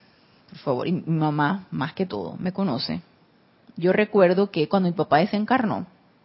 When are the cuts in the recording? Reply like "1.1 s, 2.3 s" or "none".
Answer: none